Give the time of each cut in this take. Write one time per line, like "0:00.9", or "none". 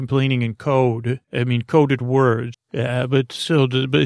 0:01.2
0:02.5